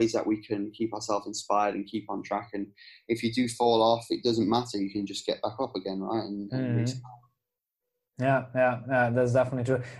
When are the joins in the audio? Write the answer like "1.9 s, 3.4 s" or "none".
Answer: none